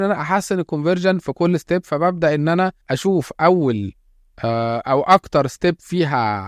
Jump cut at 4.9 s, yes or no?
no